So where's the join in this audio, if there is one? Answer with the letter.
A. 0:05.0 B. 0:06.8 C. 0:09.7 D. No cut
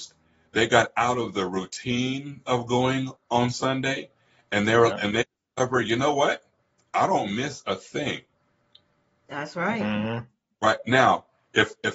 D